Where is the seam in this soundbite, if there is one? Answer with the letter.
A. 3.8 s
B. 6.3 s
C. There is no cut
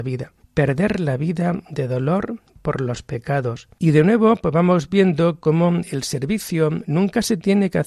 A